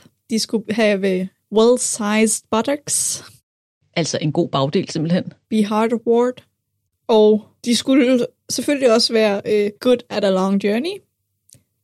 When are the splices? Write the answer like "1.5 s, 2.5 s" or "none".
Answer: 5.4 s, 7.6 s, 9.8 s